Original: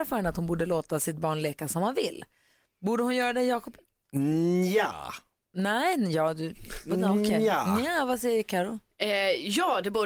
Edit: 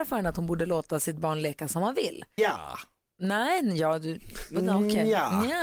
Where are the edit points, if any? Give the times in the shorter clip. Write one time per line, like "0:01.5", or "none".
0:02.4